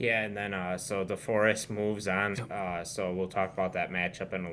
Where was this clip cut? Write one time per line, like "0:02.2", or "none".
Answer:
0:02.3